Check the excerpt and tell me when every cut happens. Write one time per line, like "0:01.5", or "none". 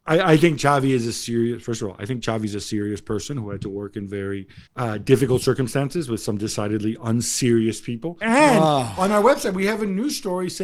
0:04.7
0:08.2